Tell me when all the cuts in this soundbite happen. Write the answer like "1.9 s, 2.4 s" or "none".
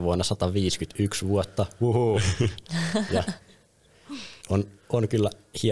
4.4 s